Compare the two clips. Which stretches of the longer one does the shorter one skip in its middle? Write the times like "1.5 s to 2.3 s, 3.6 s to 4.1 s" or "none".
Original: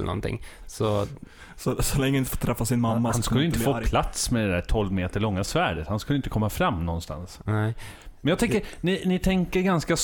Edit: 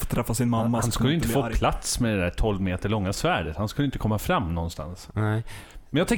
none